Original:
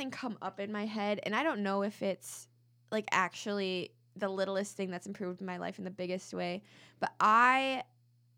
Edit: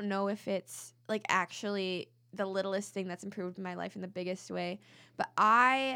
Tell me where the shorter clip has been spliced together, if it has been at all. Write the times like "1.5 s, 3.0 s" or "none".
1.0 s